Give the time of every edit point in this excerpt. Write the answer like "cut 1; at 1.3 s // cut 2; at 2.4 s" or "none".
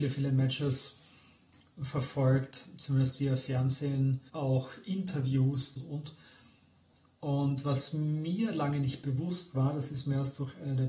cut 1; at 4.3 s // cut 2; at 5.8 s